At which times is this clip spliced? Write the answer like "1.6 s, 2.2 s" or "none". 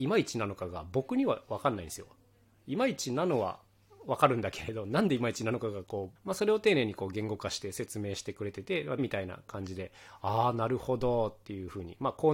6.2 s, 9.0 s